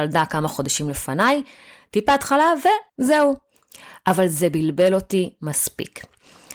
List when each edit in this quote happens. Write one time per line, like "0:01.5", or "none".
0:02.9